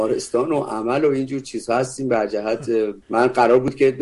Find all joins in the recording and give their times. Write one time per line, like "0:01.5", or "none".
0:03.0